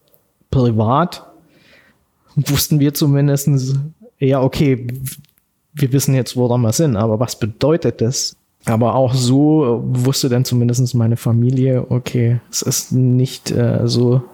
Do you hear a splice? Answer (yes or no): yes